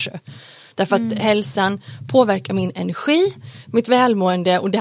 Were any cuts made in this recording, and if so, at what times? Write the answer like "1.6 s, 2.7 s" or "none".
none

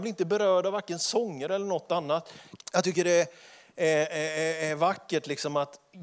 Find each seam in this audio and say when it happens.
2.6 s

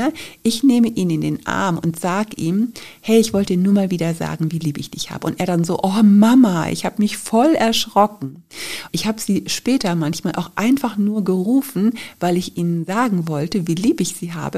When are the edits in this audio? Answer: 8.9 s

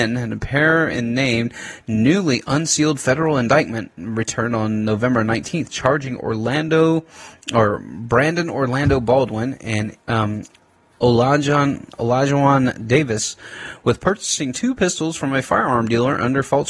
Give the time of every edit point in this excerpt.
10.0 s

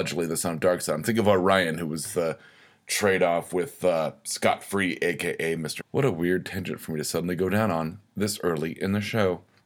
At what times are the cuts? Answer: 5.8 s

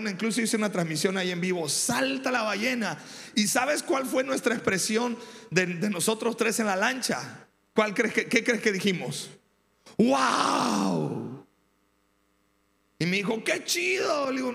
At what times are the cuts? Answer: none

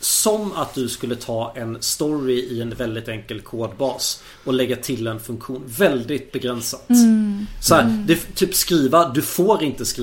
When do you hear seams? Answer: none

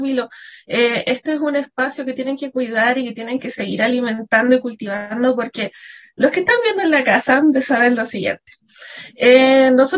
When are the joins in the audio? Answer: none

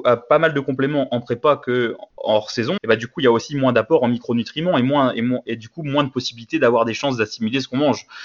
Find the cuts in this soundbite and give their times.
2.8 s

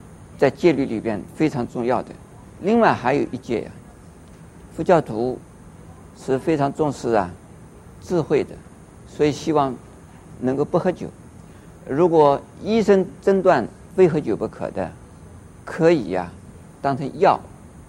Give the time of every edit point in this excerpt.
4.7 s

